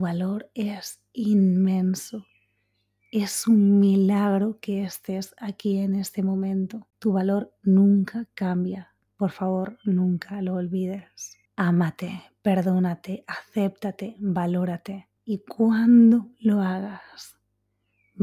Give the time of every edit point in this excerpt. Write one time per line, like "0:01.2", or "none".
0:06.9
0:11.5
0:15.2